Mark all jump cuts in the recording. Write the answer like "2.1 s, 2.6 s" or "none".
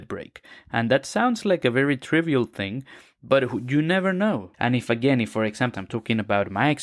4.5 s, 5.7 s